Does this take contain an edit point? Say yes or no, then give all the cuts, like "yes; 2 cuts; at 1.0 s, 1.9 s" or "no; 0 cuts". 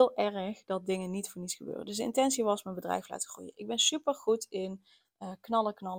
no; 0 cuts